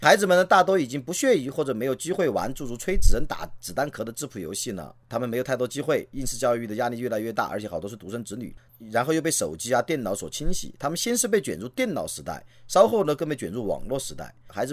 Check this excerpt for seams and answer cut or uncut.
uncut